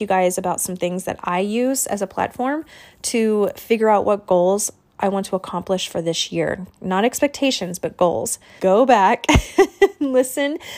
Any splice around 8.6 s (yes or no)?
yes